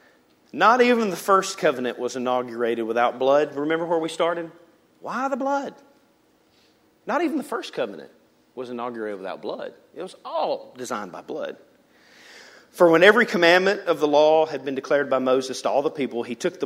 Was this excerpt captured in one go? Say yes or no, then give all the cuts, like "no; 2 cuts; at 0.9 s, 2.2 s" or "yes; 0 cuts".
yes; 0 cuts